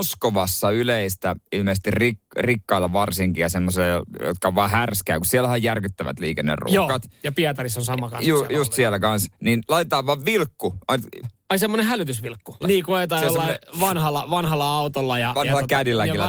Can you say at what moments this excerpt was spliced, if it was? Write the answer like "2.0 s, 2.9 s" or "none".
11.2 s, 12.6 s